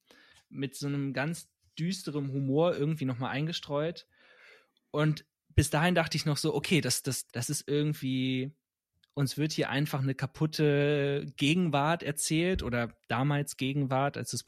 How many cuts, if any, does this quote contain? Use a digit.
1